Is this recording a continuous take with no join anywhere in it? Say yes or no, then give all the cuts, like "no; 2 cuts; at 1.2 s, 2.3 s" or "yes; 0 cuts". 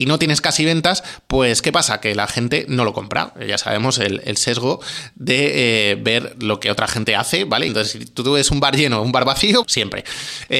no; 2 cuts; at 7.7 s, 9.6 s